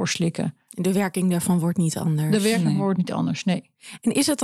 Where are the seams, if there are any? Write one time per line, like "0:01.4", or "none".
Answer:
none